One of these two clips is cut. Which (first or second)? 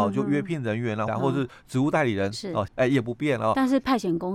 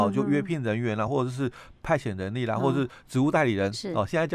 first